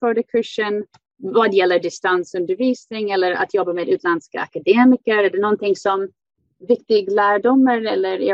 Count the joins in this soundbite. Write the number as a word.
zero